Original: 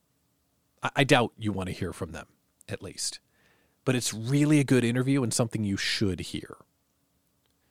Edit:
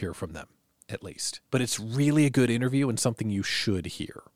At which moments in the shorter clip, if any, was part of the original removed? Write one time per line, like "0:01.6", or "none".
0:01.4